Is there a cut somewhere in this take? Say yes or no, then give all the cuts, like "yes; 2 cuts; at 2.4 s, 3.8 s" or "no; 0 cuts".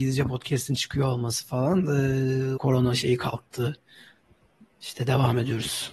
yes; 1 cut; at 2.6 s